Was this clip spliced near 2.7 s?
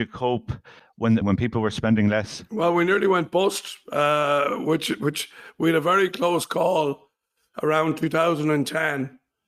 no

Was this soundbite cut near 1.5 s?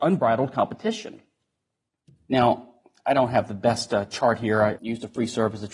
no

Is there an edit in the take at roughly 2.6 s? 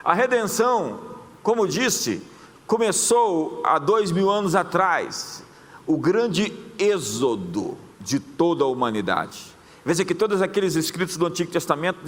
no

